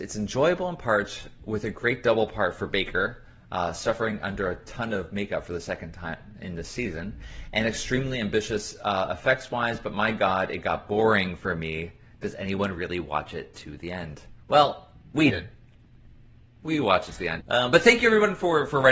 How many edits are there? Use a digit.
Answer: 2